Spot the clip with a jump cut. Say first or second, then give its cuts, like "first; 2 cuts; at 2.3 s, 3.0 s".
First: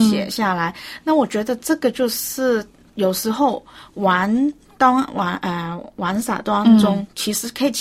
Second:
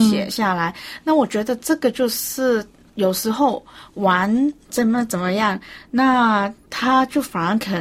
second; 1 cut; at 4.7 s